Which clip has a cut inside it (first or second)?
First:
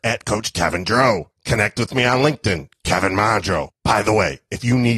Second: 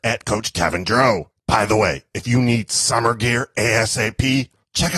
second